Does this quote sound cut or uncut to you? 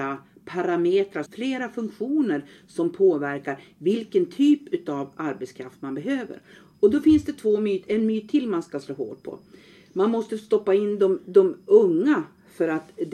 cut